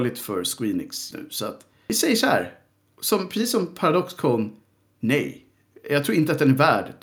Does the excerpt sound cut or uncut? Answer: cut